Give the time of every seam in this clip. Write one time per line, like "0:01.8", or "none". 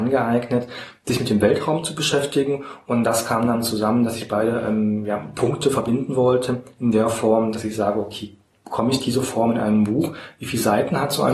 none